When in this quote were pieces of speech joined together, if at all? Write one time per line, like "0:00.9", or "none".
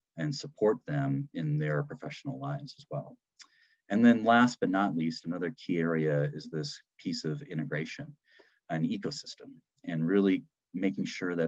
none